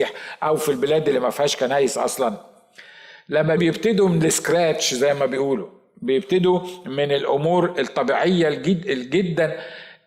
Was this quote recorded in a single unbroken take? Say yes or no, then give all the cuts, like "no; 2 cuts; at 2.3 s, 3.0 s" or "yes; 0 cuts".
no; 1 cut; at 3.6 s